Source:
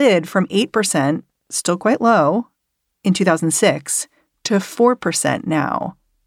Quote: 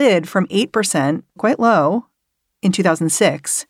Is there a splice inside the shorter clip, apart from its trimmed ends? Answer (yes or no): yes